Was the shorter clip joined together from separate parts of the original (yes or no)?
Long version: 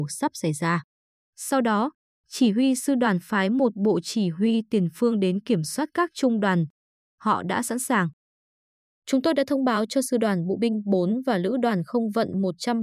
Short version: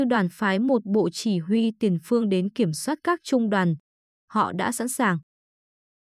no